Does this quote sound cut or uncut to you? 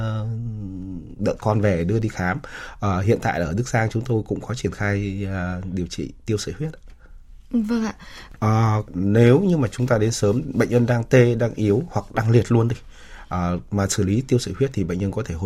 cut